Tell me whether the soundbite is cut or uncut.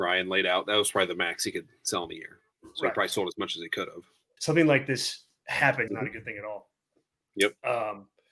cut